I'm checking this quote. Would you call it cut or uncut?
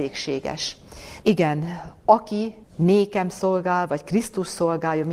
cut